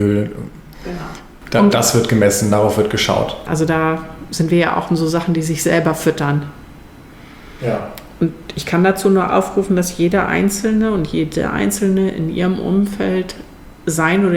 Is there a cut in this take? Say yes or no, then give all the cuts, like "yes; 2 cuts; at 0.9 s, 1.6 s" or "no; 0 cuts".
yes; 1 cut; at 3.5 s